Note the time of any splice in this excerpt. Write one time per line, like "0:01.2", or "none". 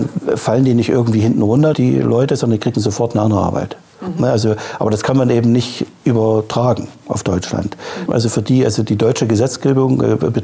0:01.7
0:08.1